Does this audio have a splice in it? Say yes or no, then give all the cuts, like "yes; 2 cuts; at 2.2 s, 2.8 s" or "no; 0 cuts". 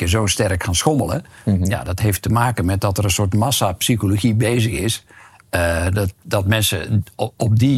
no; 0 cuts